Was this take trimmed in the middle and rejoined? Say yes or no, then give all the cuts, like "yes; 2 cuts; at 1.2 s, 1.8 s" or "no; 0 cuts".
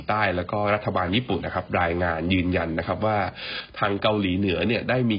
yes; 1 cut; at 1.4 s